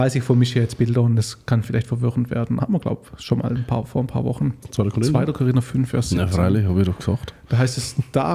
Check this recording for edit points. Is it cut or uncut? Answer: cut